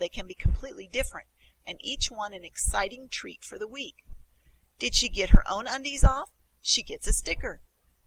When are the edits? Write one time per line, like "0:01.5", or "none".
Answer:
0:04.7